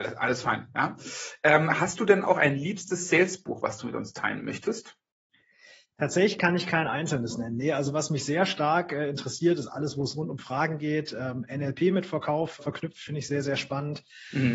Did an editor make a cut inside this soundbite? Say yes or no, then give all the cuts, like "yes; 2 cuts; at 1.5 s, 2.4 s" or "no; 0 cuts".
yes; 1 cut; at 12.6 s